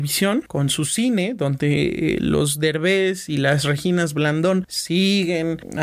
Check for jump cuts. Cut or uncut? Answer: uncut